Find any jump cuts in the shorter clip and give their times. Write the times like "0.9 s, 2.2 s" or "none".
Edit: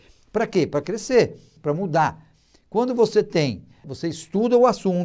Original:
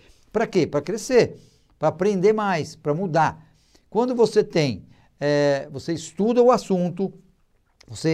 1.6 s, 3.8 s